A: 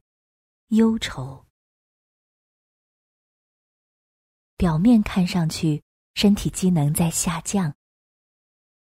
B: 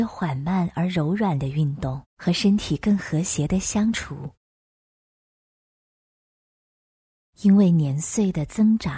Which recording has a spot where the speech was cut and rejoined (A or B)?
B